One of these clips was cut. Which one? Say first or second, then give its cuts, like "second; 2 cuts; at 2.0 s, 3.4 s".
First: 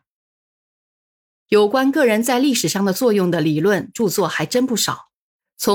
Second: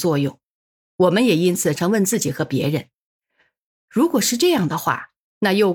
second; 1 cut; at 1.8 s